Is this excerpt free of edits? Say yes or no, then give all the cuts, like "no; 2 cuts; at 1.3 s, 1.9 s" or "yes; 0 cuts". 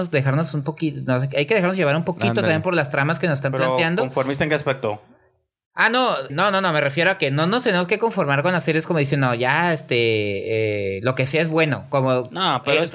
no; 1 cut; at 6.3 s